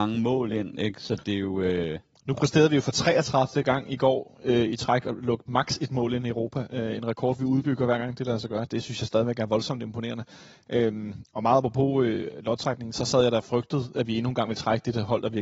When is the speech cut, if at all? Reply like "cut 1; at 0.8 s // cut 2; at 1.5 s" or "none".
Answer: none